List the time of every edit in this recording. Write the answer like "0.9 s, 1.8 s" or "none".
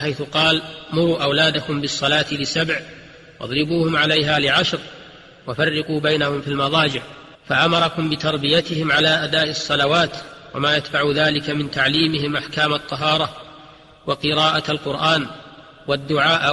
7.4 s